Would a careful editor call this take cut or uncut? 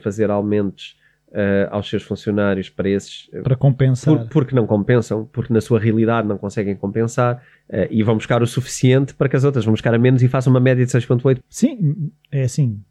cut